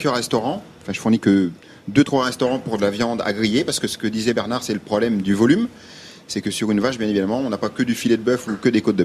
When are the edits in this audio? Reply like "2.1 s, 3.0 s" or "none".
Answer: none